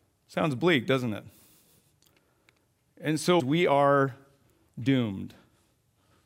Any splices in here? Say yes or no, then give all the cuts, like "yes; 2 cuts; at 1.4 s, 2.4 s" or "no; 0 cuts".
yes; 1 cut; at 3.4 s